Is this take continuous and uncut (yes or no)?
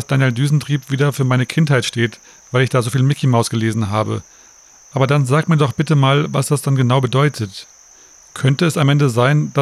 yes